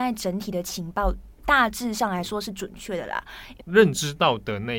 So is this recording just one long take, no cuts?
no; 1 cut; at 3.6 s

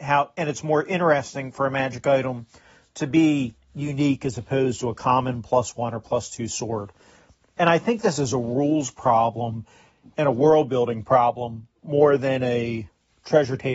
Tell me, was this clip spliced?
no; 0 cuts

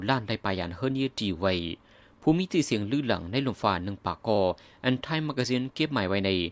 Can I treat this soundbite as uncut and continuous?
yes; 0 cuts

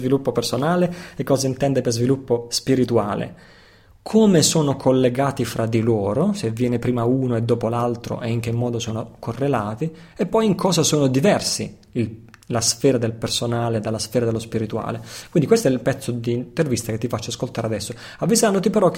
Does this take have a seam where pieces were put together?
no; 0 cuts

